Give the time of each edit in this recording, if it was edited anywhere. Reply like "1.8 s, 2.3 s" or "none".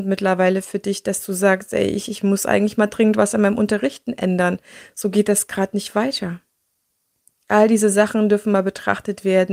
none